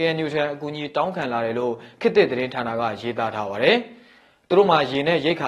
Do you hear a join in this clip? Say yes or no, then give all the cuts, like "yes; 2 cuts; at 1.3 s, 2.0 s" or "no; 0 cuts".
no; 0 cuts